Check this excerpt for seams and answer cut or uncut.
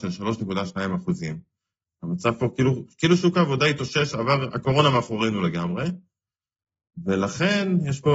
uncut